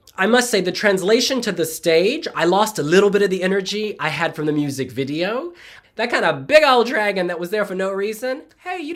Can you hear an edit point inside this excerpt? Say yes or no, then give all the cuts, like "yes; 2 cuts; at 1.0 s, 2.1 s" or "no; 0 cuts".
yes; 1 cut; at 5.8 s